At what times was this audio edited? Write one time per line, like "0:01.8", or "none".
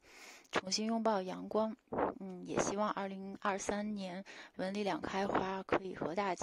none